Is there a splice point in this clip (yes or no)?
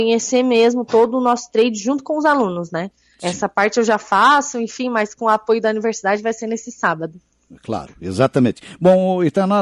no